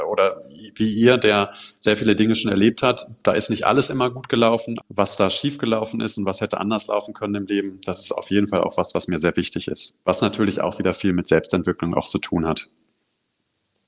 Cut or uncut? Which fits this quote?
cut